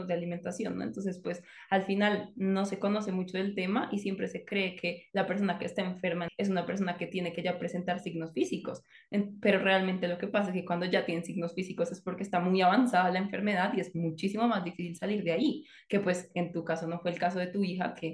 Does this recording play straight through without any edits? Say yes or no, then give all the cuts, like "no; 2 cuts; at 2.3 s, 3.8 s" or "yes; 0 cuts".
no; 1 cut; at 6.3 s